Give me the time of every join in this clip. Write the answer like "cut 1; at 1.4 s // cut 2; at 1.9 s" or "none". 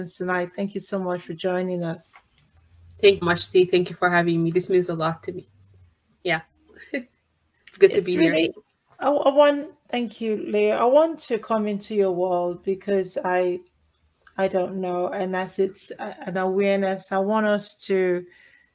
cut 1; at 3.2 s

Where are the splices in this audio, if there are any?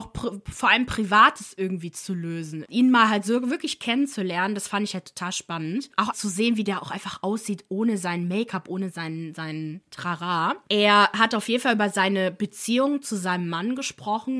cut 1; at 2.6 s // cut 2; at 6.1 s

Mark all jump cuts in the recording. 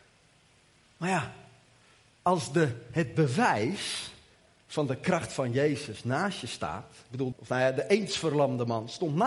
cut 1; at 7.3 s

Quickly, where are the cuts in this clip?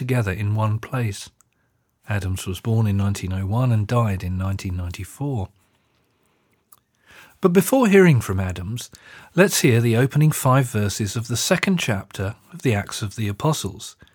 cut 1; at 2.0 s

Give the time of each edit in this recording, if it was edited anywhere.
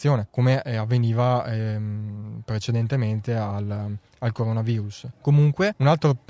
cut 1; at 5.1 s

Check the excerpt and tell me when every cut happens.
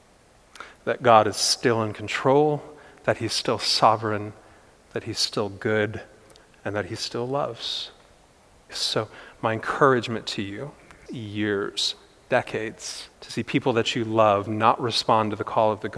cut 1; at 8.7 s // cut 2; at 11.1 s // cut 3; at 13.1 s

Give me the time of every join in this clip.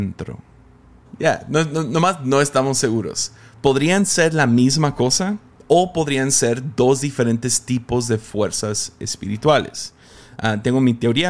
cut 1; at 1.1 s

